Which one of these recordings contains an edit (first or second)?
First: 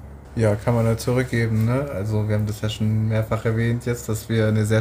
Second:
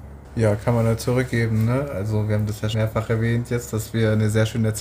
second